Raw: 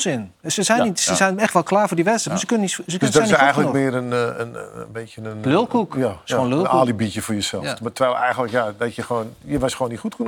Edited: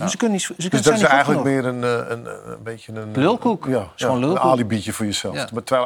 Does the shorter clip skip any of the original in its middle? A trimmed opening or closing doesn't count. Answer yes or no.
no